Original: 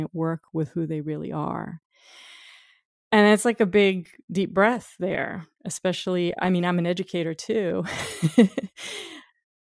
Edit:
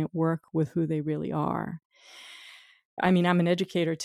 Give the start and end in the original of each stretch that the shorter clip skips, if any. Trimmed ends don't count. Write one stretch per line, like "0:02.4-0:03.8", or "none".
0:03.0-0:06.4